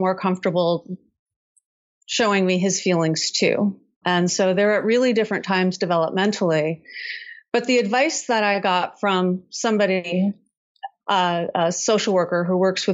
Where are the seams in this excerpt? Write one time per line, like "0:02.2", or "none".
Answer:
0:04.0